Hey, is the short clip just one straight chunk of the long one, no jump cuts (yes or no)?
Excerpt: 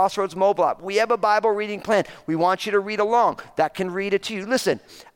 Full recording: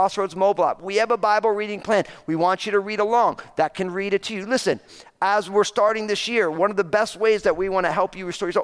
yes